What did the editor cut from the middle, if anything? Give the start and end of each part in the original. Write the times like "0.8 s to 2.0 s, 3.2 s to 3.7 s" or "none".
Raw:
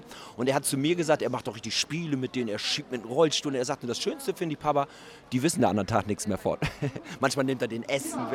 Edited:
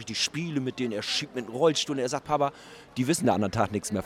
3.8 s to 4.6 s